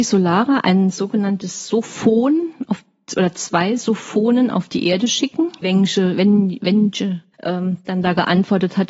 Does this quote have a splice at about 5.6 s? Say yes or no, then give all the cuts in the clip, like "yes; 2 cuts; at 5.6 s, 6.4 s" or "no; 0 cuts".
yes; 2 cuts; at 5.6 s, 7.3 s